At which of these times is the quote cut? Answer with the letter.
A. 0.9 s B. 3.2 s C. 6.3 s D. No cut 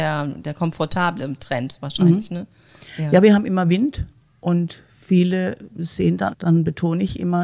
C